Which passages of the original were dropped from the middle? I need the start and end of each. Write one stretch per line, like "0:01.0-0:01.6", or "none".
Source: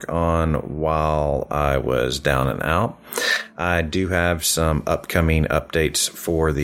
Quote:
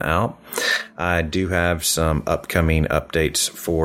none

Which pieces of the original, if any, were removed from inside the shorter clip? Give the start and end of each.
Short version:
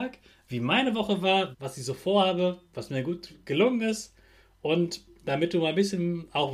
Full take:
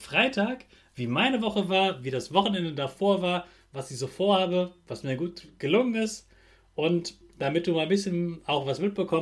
0:02.0-0:03.6

